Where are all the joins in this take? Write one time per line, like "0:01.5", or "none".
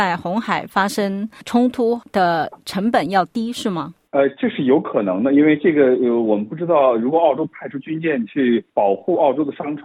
0:08.7